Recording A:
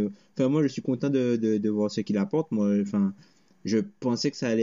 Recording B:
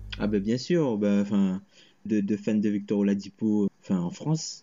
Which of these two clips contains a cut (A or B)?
B